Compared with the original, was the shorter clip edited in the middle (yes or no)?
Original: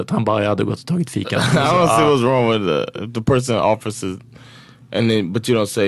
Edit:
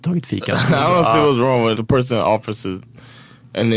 yes